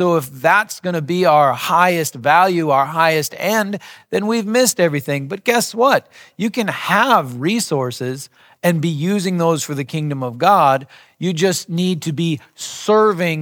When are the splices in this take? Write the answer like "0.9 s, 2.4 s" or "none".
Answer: none